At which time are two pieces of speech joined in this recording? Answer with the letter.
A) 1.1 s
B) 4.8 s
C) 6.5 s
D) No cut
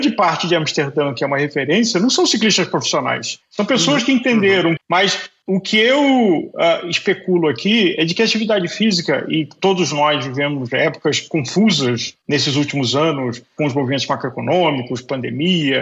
B